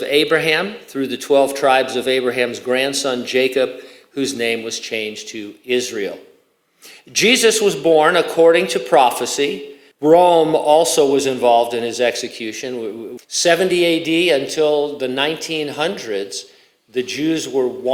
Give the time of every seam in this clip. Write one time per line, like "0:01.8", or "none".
0:09.9
0:13.2

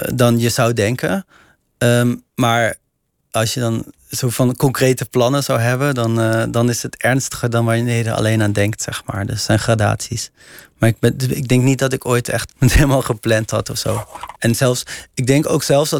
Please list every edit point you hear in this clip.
0:12.5
0:14.3

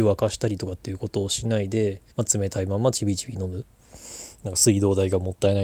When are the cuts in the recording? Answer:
0:02.1

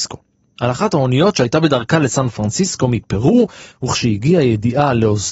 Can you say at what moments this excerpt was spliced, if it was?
0:03.7

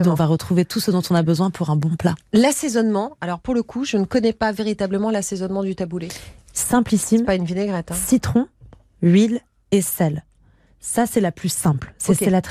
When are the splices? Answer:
none

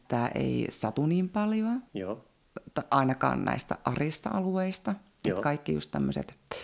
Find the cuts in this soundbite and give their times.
0:01.9

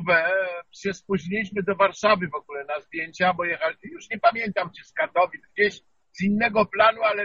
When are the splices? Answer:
none

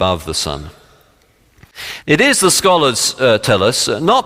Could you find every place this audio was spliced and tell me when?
0:02.0

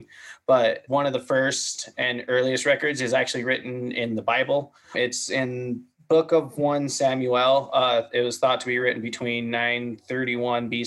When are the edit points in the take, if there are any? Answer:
none

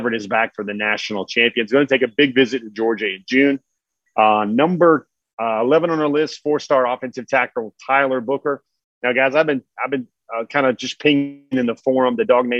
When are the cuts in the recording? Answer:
none

